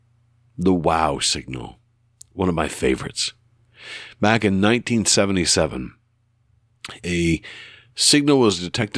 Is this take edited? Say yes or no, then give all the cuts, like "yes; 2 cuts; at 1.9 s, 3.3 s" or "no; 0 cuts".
no; 0 cuts